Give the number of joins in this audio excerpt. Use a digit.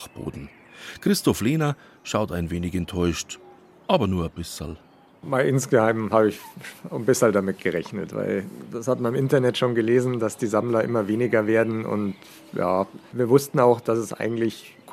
1